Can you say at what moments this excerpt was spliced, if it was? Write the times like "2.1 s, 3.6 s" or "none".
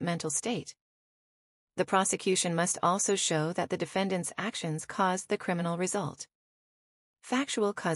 7.0 s